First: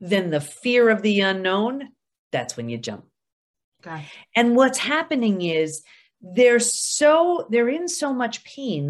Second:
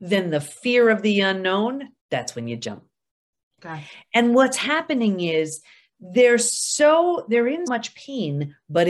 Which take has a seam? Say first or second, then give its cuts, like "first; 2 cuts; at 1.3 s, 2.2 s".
second; 2 cuts; at 2.0 s, 7.7 s